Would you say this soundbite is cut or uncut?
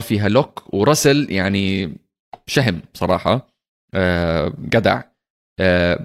uncut